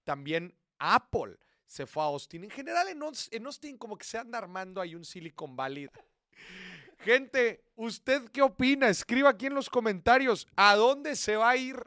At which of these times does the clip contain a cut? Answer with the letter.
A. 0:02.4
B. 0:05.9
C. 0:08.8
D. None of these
B